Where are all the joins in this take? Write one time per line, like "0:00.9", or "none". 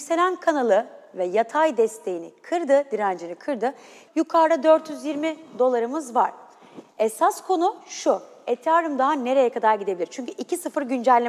0:04.1